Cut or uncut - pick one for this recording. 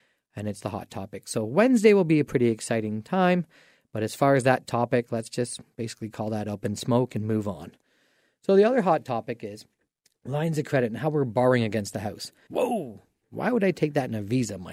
cut